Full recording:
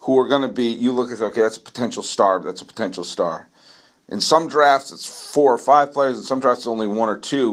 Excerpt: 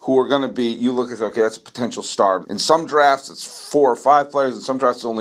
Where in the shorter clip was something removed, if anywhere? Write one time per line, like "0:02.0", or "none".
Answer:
0:02.4